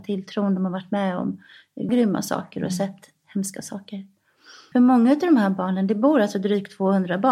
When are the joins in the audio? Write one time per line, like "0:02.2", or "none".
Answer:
0:01.9
0:04.7